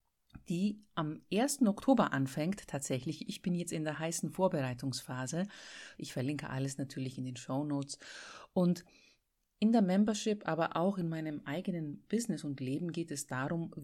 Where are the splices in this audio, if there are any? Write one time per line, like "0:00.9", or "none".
0:06.0